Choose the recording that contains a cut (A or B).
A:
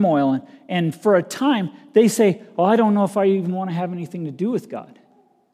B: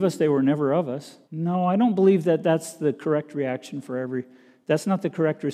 B